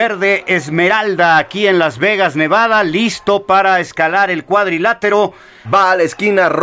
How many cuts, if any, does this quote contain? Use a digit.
1